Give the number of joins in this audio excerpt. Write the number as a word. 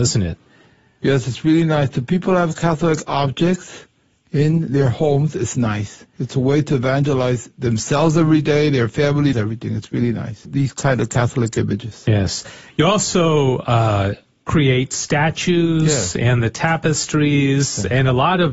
two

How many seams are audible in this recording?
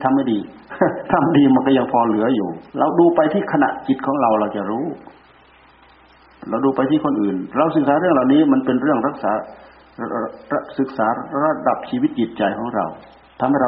one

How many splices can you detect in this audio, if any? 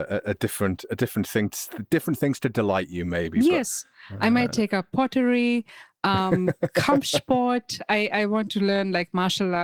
zero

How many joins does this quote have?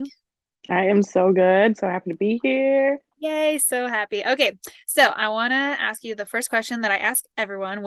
zero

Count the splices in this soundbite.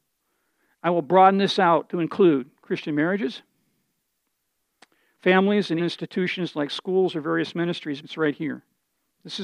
two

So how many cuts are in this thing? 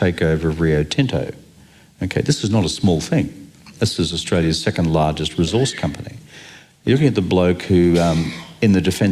zero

